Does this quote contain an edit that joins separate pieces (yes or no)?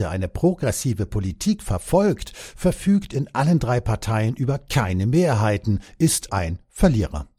yes